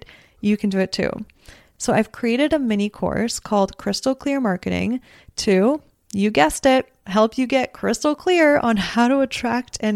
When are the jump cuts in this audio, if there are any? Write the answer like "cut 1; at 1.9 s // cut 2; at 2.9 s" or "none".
cut 1; at 1.7 s